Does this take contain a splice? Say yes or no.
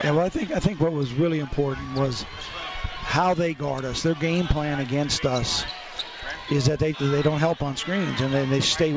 yes